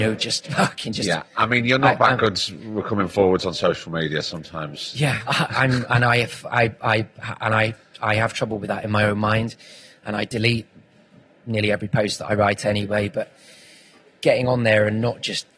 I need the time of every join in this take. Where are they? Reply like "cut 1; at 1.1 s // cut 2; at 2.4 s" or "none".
cut 1; at 5.3 s